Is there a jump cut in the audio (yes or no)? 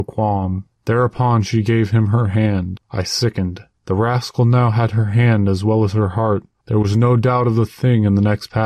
yes